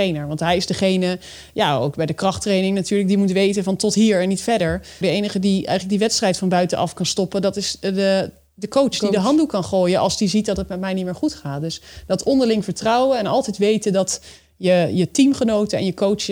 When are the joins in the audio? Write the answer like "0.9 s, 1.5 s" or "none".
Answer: 5.0 s